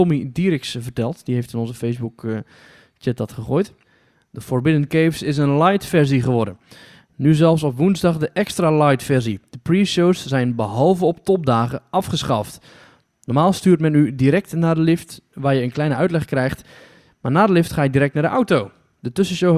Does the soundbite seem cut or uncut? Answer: uncut